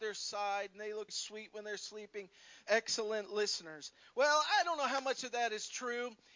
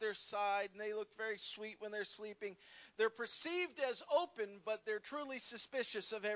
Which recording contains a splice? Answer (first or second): first